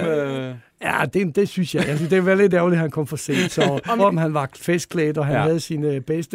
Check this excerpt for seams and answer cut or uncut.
cut